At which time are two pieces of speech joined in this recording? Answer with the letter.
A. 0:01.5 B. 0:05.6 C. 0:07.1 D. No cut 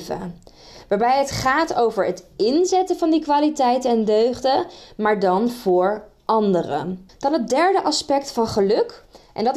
C